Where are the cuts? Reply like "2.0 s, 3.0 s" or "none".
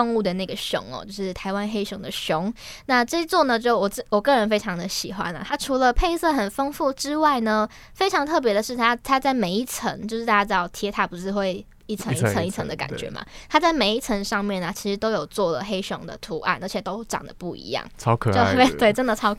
none